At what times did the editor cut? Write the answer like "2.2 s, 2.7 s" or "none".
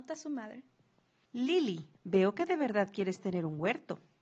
1.9 s